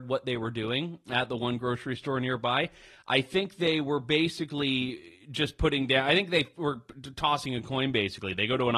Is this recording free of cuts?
yes; 0 cuts

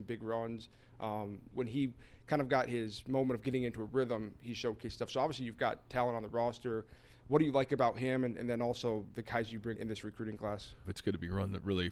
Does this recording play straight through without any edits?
no; 3 cuts; at 1.5 s, 9.8 s, 10.8 s

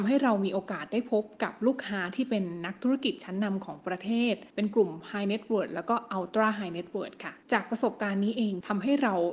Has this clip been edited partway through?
yes; 2 cuts; at 4.5 s, 7.4 s

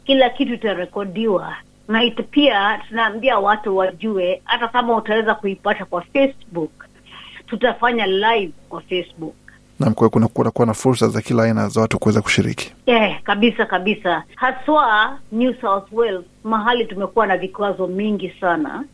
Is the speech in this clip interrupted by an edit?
yes; 1 cut; at 12.8 s

